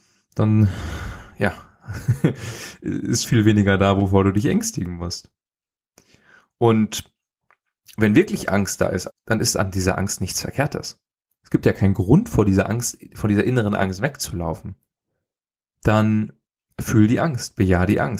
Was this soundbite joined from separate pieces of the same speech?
yes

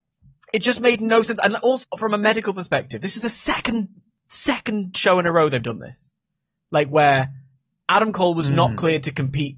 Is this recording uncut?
no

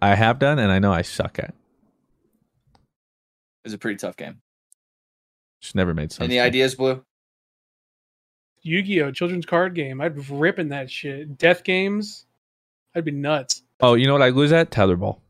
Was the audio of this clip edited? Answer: yes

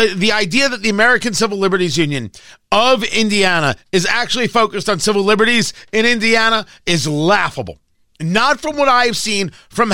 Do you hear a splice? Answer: no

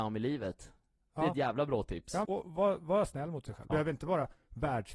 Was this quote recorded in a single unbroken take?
no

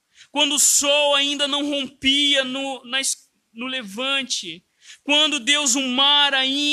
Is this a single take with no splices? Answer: yes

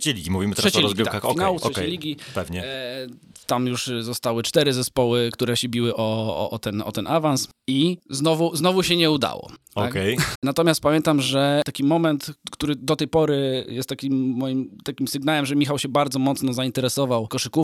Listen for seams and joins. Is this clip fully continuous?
no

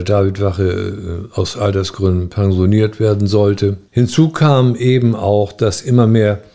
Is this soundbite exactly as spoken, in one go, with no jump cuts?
yes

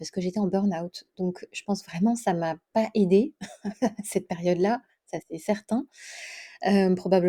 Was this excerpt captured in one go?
yes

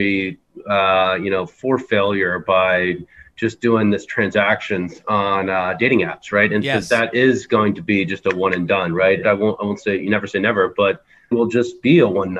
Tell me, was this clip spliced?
yes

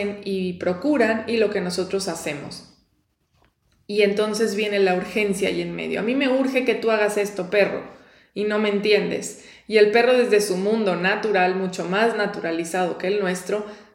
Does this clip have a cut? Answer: no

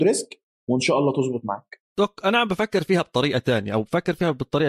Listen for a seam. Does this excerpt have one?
yes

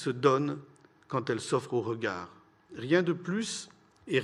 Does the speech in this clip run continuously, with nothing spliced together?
no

